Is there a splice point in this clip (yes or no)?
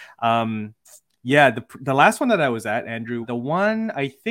yes